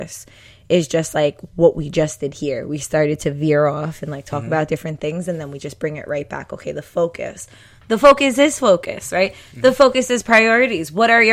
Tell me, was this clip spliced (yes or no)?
no